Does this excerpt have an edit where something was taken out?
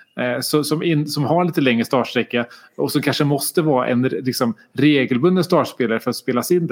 no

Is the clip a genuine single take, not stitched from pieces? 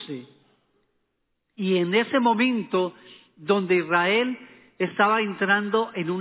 no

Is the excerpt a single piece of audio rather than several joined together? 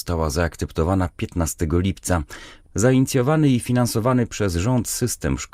no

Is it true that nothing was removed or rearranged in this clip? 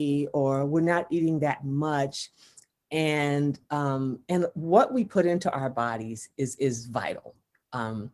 yes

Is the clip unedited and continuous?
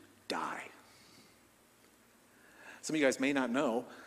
no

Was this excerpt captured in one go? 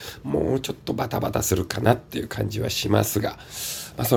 yes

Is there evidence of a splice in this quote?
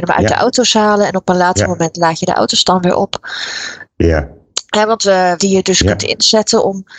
yes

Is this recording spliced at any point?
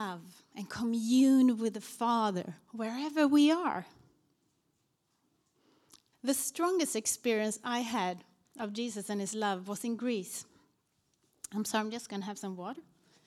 yes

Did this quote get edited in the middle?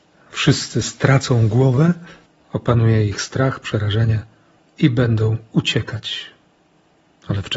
no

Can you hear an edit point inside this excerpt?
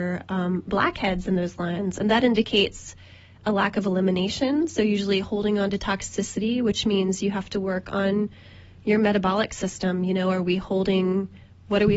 no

